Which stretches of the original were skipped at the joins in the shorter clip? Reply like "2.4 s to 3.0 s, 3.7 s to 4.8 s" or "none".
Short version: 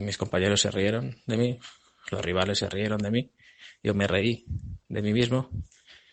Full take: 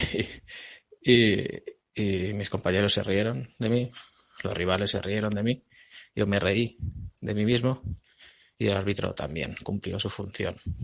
none